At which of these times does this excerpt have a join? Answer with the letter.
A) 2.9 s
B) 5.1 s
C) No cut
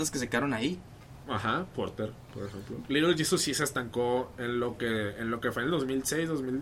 A